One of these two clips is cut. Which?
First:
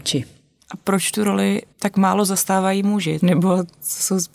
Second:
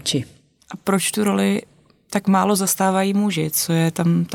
first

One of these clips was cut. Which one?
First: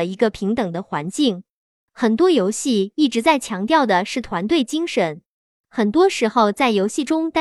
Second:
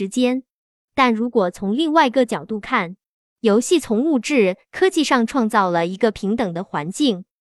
second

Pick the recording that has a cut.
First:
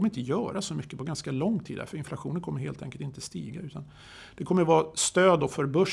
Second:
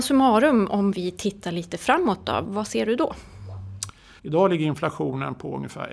second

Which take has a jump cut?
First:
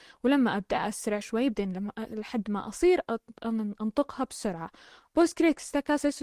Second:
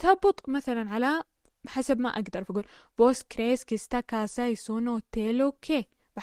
first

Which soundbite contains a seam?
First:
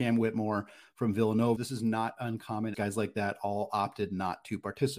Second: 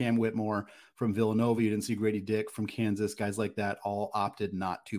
first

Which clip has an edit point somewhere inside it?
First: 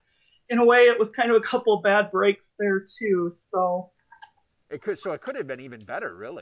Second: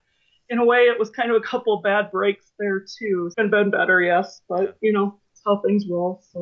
second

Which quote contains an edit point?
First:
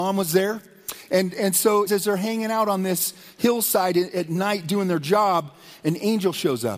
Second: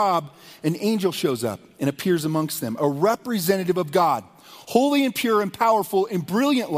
first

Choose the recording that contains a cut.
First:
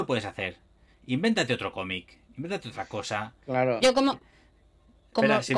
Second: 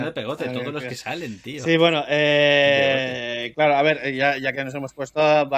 first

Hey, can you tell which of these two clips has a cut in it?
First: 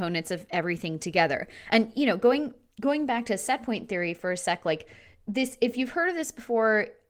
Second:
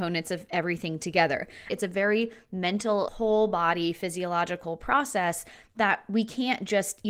second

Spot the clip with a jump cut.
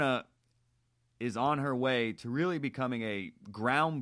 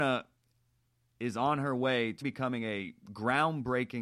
second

